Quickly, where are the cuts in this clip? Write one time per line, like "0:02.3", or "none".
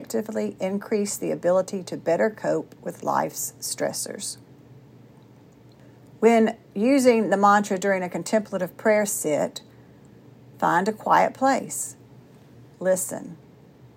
0:12.7